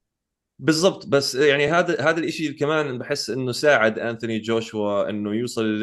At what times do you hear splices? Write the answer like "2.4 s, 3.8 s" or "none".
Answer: none